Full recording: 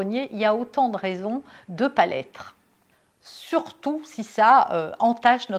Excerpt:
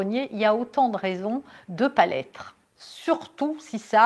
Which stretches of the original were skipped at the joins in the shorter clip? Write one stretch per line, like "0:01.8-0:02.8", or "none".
0:02.6-0:03.1